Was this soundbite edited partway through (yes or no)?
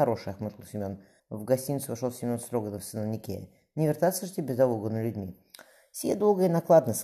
yes